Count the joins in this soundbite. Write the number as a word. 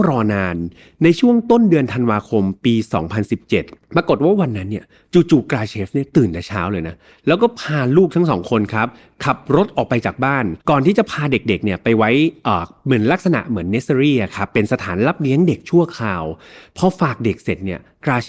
one